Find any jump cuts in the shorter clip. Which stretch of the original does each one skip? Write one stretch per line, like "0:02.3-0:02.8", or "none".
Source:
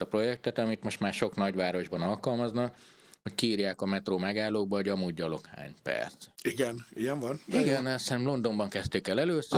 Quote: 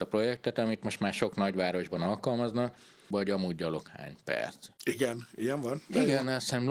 0:03.1-0:04.7